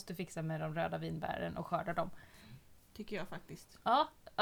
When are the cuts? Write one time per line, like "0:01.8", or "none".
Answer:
0:02.9